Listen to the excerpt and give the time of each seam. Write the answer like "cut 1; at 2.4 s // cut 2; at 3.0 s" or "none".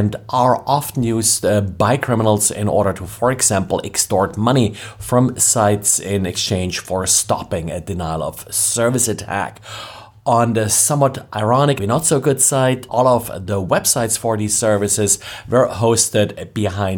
cut 1; at 11.8 s // cut 2; at 12.9 s